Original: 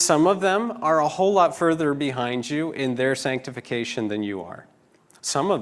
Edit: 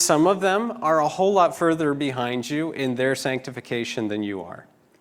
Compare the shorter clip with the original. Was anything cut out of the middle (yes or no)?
no